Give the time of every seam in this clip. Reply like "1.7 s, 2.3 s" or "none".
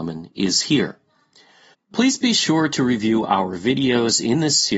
1.7 s

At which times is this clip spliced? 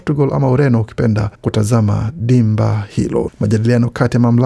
1.3 s, 3.3 s

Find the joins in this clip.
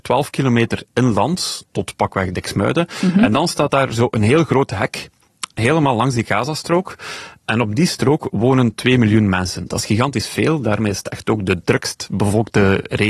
none

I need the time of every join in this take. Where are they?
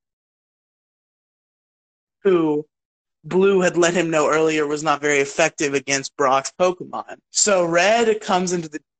7.2 s

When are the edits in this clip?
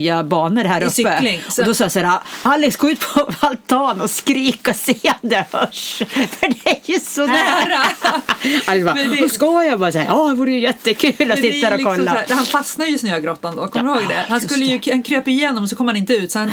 7.3 s

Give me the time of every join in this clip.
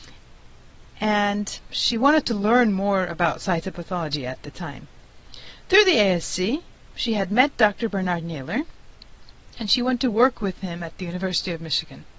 none

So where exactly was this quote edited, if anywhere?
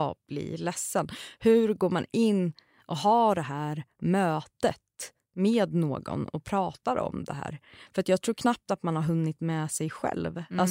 none

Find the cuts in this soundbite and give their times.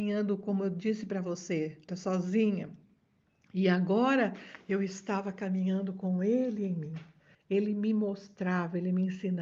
1.9 s, 7.3 s

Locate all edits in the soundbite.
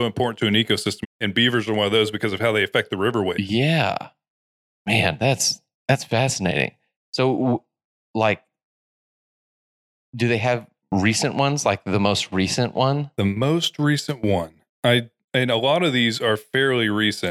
1.0 s

